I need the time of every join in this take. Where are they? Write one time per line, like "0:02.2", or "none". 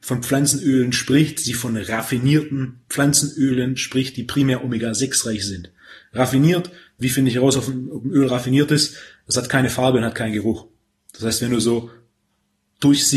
none